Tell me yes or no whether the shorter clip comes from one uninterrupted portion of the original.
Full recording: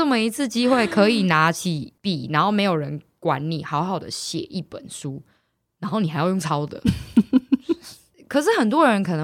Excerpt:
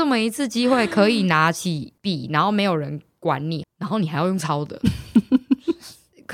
no